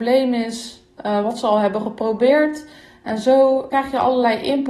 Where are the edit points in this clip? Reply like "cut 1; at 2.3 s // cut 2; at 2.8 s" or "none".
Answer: cut 1; at 3.7 s